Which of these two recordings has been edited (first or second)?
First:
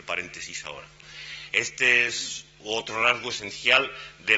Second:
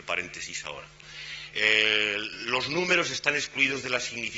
first